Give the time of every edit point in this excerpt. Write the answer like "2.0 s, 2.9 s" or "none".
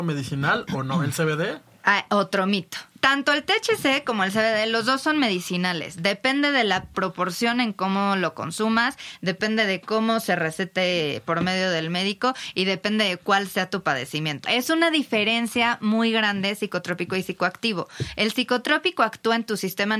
2.9 s, 14.4 s